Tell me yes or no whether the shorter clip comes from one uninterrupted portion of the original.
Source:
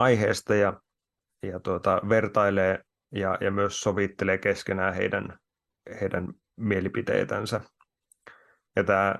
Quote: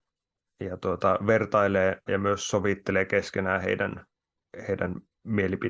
no